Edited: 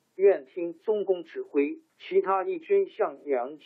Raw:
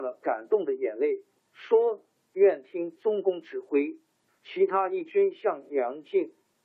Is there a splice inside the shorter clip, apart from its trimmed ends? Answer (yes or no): yes